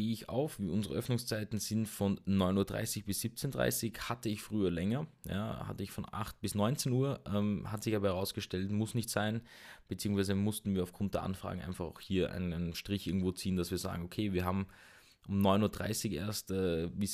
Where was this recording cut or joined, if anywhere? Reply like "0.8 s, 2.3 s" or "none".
none